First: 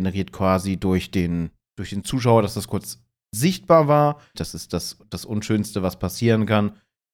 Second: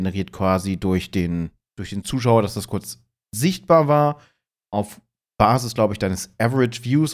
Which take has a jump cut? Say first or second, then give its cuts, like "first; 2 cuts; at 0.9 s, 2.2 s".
first; 1 cut; at 4.3 s